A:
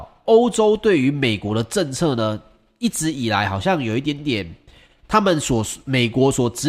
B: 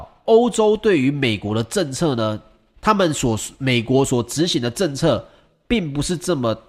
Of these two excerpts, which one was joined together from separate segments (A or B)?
B